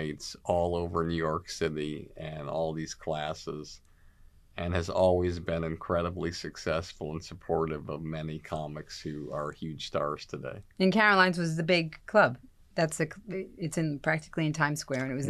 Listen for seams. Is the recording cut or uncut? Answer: uncut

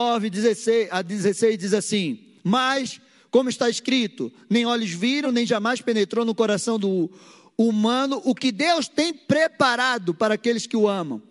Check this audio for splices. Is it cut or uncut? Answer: cut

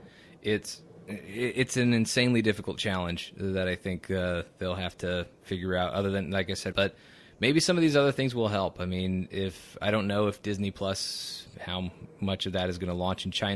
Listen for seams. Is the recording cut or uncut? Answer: cut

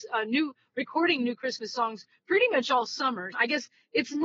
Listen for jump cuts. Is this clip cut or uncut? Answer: cut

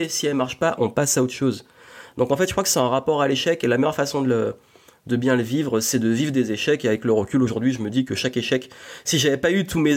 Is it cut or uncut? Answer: uncut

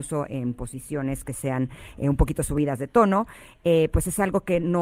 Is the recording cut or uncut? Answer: uncut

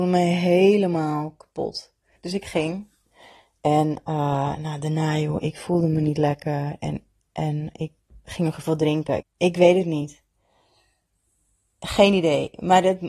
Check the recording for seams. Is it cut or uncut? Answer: cut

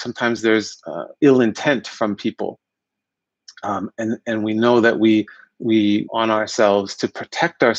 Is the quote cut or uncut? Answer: cut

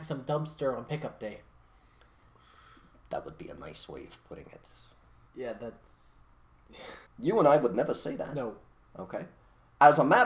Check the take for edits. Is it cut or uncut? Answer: cut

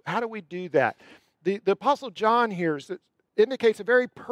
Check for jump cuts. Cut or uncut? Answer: uncut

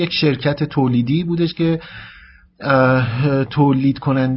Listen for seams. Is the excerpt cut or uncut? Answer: uncut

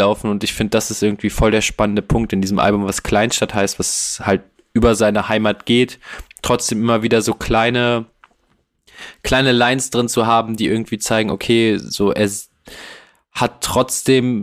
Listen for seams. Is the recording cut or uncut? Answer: uncut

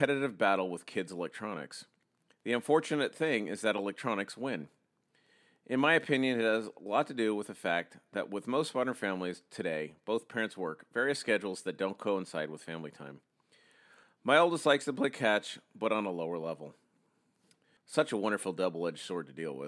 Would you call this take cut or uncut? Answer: cut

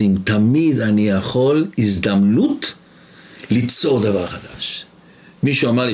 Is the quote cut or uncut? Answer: uncut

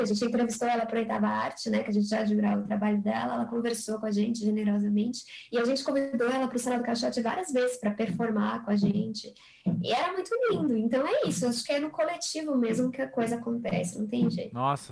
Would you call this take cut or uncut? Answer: uncut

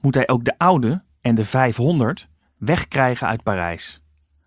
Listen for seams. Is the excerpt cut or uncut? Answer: cut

